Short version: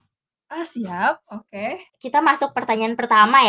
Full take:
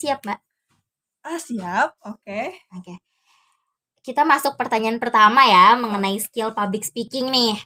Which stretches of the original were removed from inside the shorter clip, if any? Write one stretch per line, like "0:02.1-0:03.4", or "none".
0:02.6-0:03.9